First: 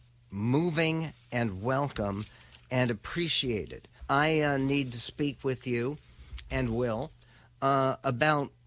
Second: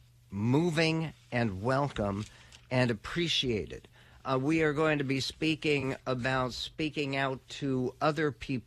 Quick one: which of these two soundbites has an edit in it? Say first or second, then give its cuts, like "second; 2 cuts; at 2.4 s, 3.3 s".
first; 1 cut; at 4.0 s